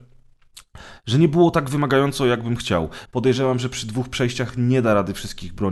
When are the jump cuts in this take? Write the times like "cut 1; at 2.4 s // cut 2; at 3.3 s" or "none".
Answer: cut 1; at 3.1 s